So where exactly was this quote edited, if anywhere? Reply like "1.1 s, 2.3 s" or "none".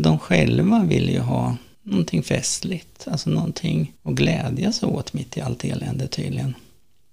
4.0 s